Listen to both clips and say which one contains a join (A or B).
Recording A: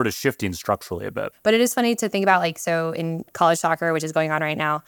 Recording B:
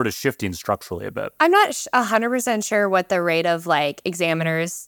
A